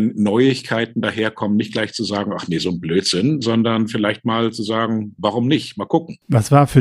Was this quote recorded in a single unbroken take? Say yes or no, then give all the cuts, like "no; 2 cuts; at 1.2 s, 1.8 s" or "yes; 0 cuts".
yes; 0 cuts